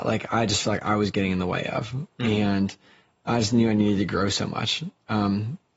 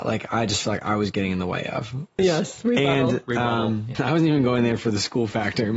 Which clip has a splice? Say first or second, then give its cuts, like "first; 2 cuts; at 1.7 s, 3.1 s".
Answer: second; 2 cuts; at 2.2 s, 3.9 s